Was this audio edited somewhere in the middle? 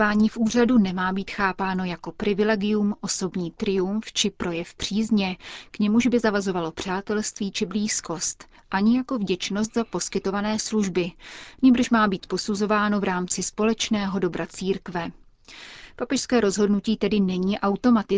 no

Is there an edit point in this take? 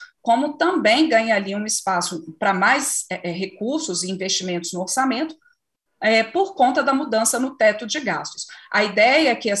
no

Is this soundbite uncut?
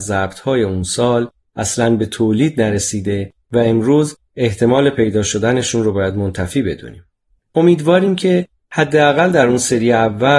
no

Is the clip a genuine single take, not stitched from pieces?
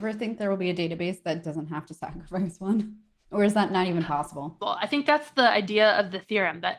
no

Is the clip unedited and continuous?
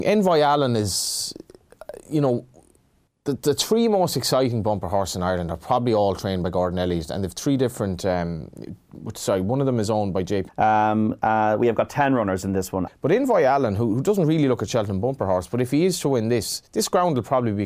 no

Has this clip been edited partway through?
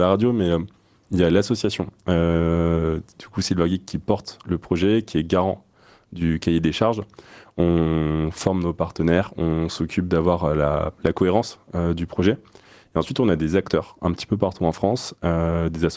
no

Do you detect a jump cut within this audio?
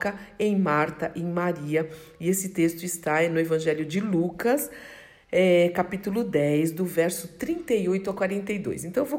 no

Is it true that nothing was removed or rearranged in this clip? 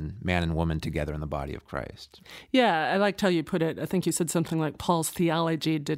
yes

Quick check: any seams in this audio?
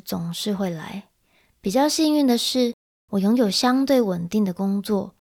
no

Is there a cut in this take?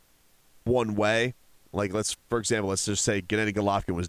no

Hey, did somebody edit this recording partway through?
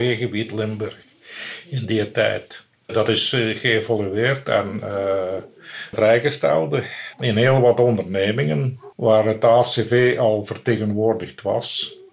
yes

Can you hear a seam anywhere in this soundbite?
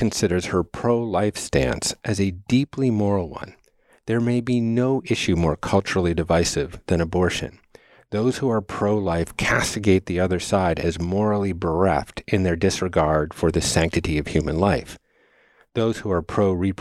no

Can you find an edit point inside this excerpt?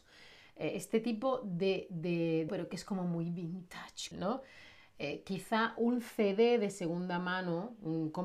yes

